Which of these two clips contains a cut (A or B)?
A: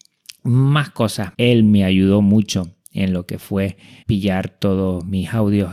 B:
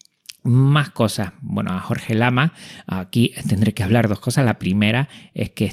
A